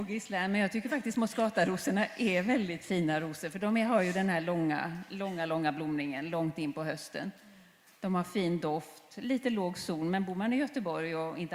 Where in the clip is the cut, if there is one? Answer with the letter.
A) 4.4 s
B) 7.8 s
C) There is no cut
C